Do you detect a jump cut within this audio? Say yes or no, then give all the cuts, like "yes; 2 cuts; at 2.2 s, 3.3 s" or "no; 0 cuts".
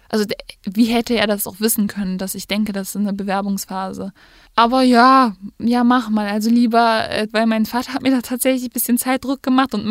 yes; 2 cuts; at 4.5 s, 7.3 s